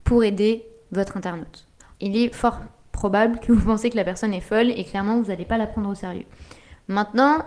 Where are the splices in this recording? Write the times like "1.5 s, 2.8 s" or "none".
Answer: 2.0 s